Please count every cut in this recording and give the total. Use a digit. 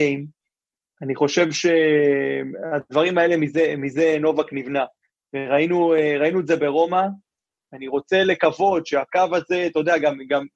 0